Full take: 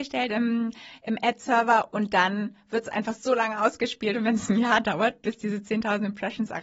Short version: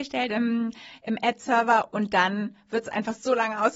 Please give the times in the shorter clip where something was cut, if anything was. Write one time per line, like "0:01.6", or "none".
none